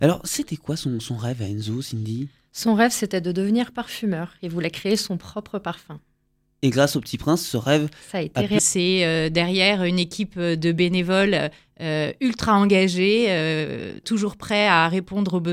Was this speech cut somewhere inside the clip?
yes; 2 cuts; at 8.6 s, 14.0 s

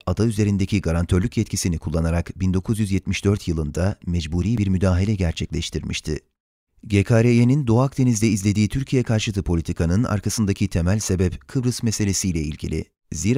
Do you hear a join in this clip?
yes; 1 cut; at 6.7 s

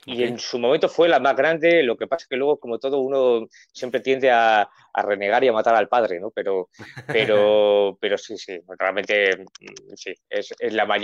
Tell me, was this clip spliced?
no; 0 cuts

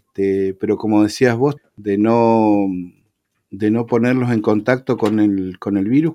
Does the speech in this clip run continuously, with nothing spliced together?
no; 1 cut; at 1.6 s

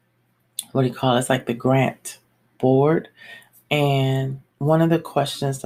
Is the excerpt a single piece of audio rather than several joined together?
no; 1 cut; at 4.5 s

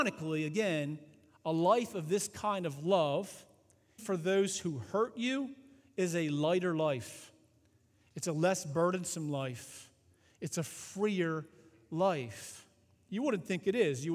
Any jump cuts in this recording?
yes; 1 cut; at 4.0 s

